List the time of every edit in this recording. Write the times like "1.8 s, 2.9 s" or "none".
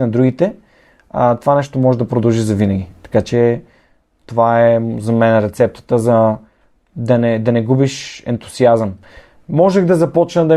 none